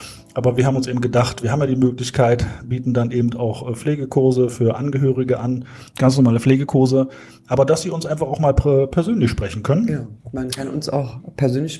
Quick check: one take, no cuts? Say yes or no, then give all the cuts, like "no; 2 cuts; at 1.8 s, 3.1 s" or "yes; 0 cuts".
yes; 0 cuts